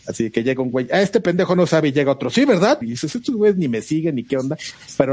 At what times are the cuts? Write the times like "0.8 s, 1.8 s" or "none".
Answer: 2.8 s